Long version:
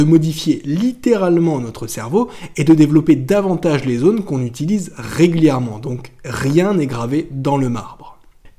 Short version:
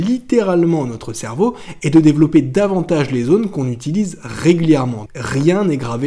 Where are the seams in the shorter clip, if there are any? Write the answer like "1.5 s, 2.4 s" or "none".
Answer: 5.1 s